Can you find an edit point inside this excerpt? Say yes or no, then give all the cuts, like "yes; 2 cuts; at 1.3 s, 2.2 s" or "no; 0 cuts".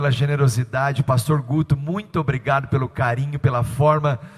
no; 0 cuts